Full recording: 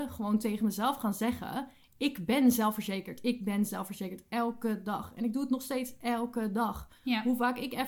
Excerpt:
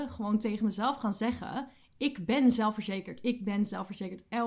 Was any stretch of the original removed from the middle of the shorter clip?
no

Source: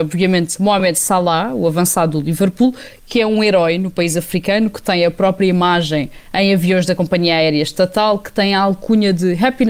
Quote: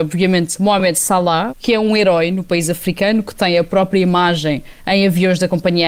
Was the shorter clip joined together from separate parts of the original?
yes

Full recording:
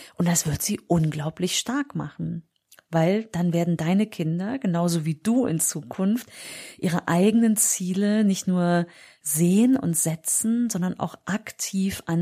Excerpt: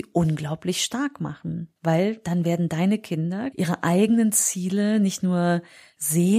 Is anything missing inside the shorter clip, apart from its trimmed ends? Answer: yes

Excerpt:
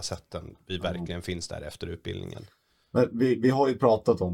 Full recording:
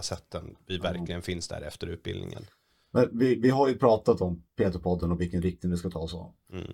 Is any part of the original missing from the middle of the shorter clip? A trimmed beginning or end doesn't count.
no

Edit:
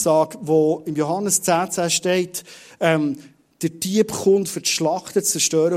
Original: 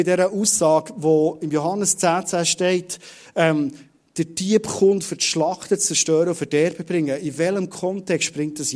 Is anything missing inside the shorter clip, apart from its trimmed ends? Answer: no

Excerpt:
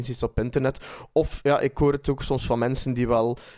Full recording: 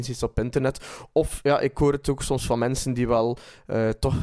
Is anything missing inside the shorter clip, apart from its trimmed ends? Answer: no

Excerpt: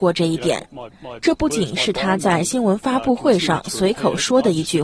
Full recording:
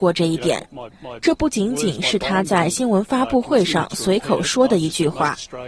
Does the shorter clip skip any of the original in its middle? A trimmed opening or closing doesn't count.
yes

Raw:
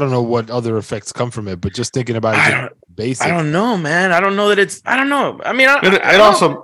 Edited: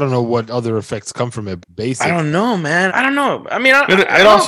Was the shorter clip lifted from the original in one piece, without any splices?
no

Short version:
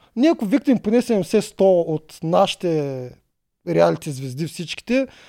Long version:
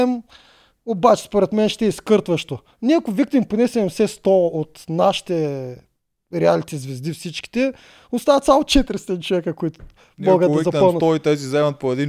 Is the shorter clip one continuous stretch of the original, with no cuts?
yes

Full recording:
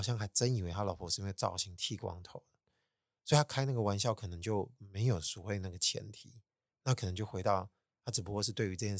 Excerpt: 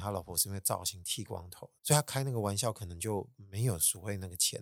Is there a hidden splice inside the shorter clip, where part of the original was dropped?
yes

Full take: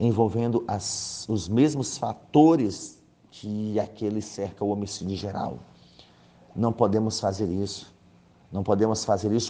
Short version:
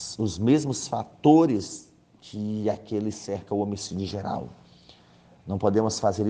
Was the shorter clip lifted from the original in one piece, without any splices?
no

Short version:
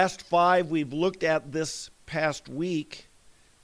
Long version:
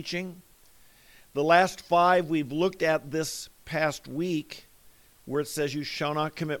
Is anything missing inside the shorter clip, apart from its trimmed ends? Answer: no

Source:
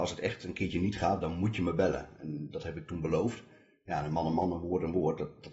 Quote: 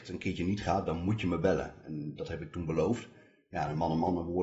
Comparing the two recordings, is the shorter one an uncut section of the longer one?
yes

